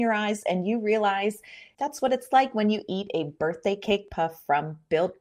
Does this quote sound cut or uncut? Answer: cut